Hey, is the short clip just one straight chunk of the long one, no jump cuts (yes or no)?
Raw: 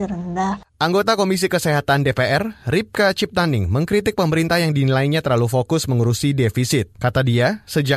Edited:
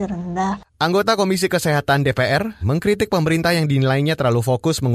no